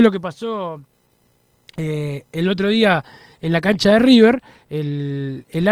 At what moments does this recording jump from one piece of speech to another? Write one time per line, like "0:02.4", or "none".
none